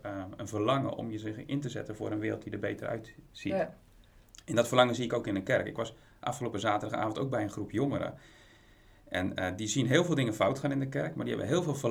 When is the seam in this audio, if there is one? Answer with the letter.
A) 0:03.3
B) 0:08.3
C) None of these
C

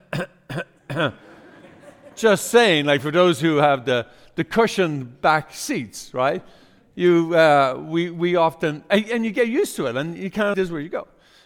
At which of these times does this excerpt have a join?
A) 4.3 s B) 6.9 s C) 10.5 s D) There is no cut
C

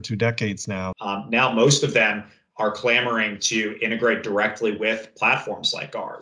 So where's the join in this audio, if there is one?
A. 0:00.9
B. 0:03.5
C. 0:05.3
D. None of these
A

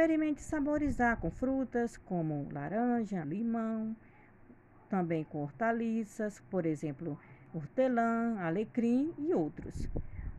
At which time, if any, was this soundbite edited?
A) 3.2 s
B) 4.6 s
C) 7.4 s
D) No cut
A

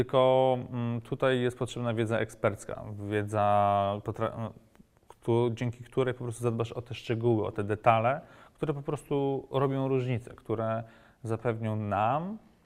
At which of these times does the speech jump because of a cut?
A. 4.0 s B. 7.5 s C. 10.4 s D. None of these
A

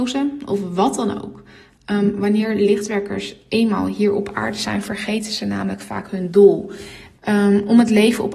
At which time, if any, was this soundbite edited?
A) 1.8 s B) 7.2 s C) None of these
B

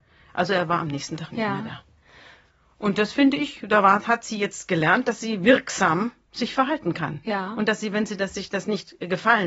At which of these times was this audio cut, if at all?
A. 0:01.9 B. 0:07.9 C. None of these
C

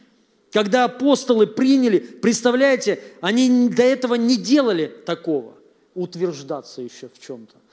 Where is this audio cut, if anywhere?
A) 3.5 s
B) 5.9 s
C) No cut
B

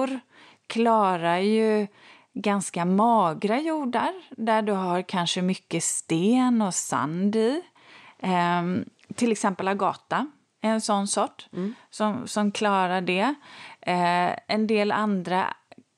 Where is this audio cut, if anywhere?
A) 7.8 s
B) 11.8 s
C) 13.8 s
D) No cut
D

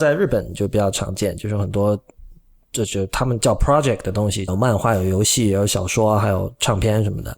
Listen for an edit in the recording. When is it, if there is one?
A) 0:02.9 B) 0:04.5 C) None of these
B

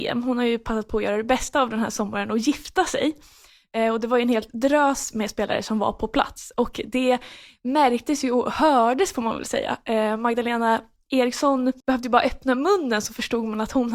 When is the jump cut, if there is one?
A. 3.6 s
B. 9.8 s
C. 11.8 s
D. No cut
C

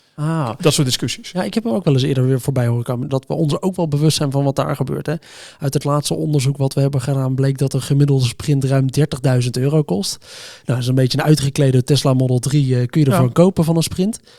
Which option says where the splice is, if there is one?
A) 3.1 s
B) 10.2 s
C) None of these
A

